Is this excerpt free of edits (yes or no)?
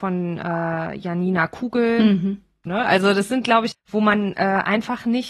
no